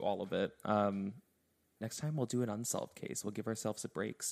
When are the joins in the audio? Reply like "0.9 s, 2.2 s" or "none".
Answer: 1.8 s